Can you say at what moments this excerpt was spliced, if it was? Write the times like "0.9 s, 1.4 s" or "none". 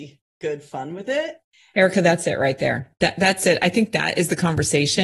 none